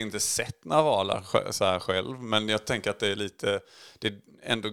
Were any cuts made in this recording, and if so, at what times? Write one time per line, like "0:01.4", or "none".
none